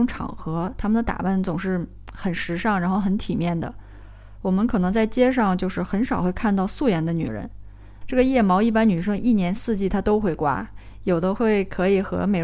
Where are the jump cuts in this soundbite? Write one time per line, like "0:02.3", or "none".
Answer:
0:08.0